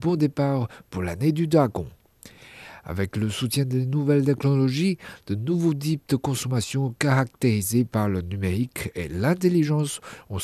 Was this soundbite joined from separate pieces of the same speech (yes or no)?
no